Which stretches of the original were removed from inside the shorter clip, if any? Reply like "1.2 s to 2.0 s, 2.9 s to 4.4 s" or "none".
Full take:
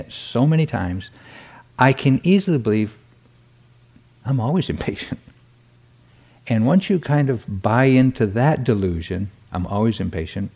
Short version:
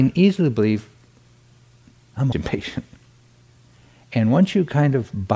4.4 s to 4.7 s